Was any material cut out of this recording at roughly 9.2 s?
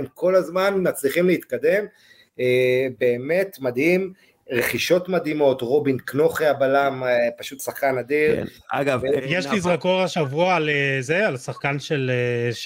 yes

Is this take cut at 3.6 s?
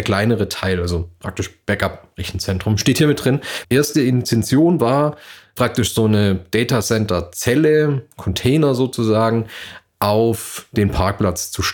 yes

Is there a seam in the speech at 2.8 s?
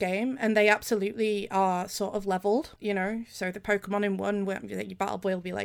yes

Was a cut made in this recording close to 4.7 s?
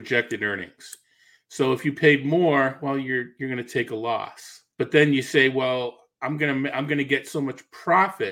yes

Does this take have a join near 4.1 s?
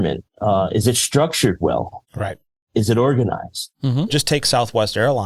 yes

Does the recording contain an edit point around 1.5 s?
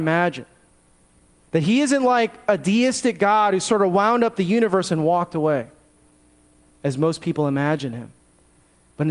yes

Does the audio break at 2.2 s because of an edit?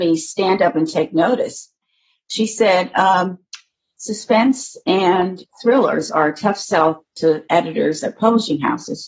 no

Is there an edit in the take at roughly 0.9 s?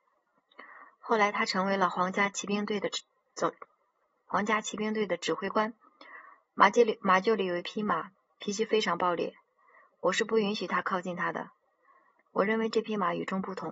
no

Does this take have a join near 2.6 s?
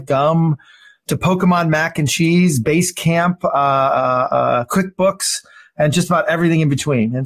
no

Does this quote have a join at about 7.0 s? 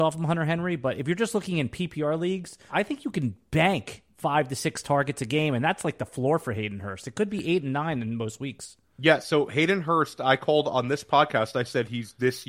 no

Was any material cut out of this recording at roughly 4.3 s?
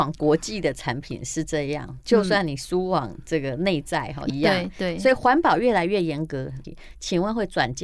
yes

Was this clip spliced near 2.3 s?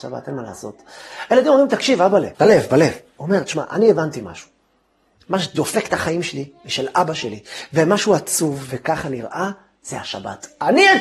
yes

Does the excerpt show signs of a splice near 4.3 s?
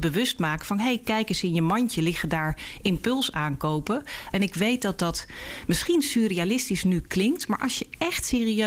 yes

